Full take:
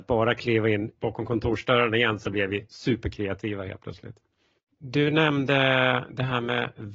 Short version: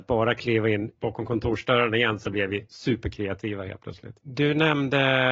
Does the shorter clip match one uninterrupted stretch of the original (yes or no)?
no